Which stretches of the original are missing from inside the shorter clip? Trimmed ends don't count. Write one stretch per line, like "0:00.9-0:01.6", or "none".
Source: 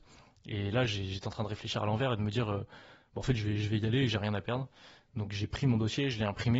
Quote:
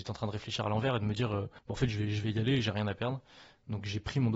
0:02.8-0:03.1